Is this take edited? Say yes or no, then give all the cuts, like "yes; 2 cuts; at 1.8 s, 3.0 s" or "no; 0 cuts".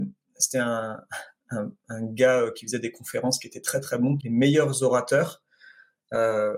yes; 1 cut; at 4.2 s